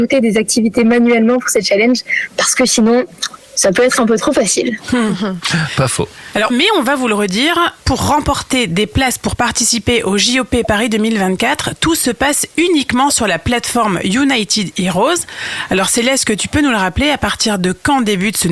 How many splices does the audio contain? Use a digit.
1